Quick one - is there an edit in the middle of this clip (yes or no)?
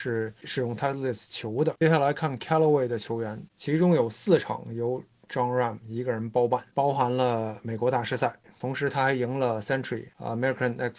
yes